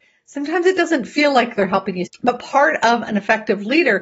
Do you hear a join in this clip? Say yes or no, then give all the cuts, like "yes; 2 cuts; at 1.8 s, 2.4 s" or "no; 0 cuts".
yes; 1 cut; at 2.1 s